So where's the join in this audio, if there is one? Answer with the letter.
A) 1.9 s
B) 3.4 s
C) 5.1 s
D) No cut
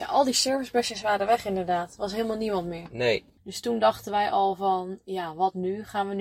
D